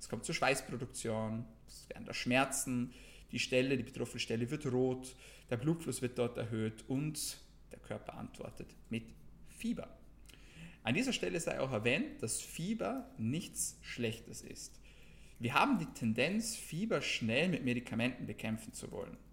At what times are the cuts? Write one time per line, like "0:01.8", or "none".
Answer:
none